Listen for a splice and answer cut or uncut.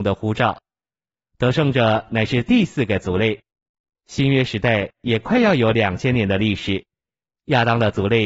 uncut